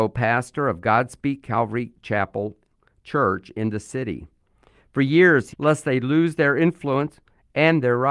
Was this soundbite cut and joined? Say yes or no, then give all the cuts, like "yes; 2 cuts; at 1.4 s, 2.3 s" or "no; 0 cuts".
yes; 1 cut; at 5.5 s